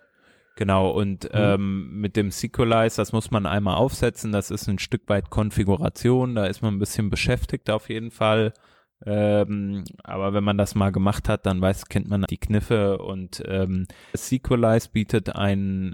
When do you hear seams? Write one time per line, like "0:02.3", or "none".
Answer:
0:12.3
0:14.1